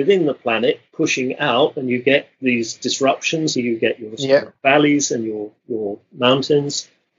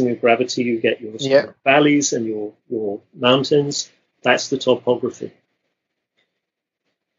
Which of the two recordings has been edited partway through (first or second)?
first